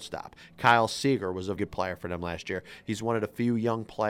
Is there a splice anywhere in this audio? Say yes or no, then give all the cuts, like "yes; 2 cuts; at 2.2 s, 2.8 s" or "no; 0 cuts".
yes; 1 cut; at 1.6 s